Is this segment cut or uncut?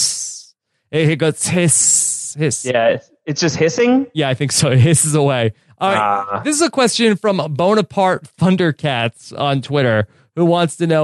uncut